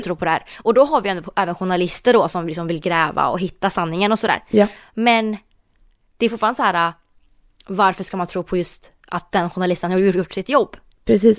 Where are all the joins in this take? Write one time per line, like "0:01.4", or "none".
none

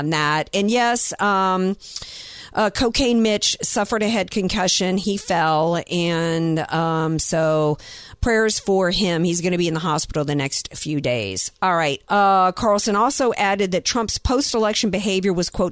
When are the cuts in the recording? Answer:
0:12.0

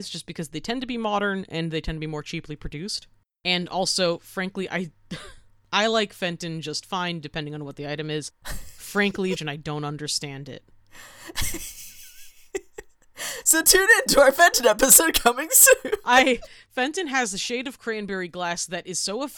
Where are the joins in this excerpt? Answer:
0:09.4

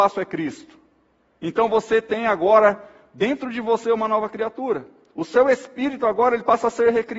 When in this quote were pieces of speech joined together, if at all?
none

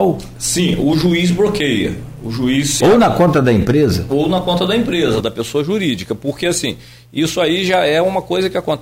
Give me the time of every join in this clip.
0:02.8

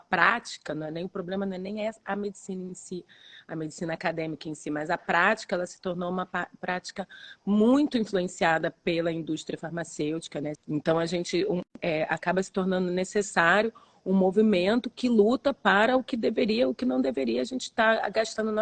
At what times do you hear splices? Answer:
0:10.5
0:11.8

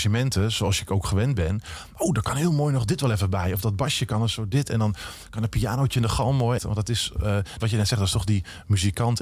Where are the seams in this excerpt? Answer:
0:06.6
0:07.6

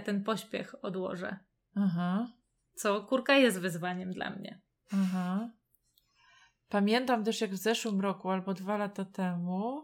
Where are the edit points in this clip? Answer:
none

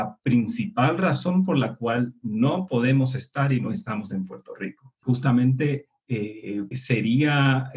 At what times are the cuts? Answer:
0:05.0
0:06.7

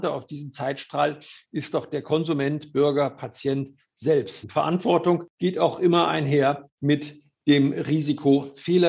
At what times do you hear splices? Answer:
0:04.4

